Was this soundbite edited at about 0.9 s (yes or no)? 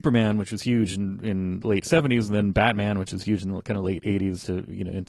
no